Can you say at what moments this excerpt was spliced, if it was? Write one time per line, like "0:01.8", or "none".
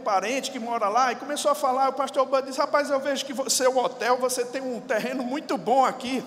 none